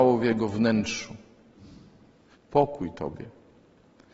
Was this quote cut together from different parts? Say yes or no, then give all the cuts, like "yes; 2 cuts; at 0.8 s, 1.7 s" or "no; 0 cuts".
yes; 1 cut; at 2.3 s